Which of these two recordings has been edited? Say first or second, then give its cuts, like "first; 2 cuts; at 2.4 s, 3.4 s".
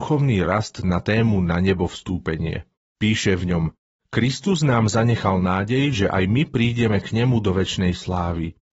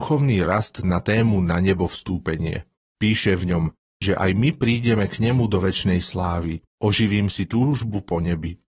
second; 1 cut; at 4.0 s